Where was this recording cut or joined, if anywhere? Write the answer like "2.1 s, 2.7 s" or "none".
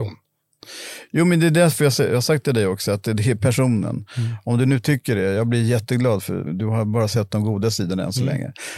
6.5 s